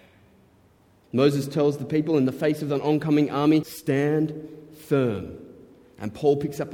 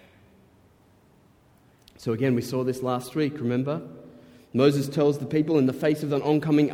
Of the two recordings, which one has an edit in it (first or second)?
first